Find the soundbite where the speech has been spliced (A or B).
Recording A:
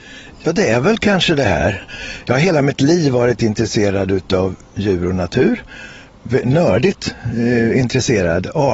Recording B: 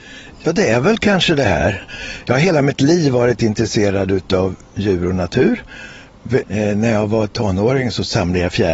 B